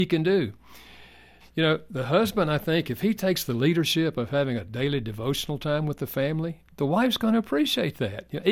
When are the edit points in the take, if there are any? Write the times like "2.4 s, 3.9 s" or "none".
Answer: 1.4 s, 6.7 s